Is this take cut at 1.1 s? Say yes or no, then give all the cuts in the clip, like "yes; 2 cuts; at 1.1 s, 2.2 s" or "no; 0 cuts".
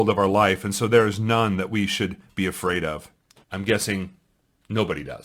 no; 1 cut; at 3.4 s